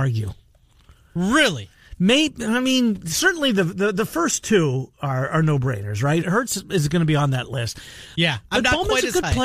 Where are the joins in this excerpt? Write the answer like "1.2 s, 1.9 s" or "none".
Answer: 6.2 s, 8.1 s